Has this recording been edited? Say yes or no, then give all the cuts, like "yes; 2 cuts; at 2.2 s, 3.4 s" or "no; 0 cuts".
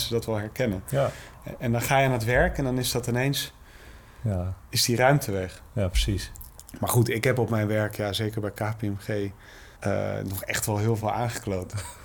yes; 1 cut; at 9.8 s